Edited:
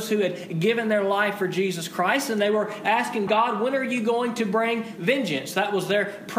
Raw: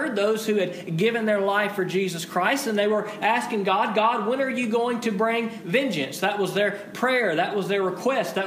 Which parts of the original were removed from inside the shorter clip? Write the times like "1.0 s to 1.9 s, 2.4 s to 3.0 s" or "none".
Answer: 3.6 s to 3.9 s